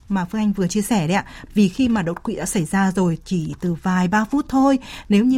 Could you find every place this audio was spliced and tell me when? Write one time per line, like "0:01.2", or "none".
0:01.5